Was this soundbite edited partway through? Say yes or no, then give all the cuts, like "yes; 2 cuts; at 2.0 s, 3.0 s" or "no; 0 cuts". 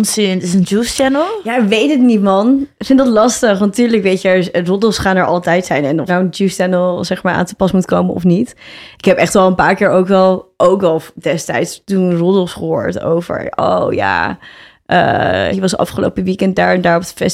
yes; 2 cuts; at 6.1 s, 15.5 s